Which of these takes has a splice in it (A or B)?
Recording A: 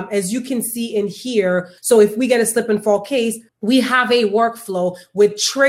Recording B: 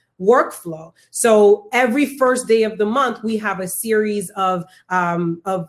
A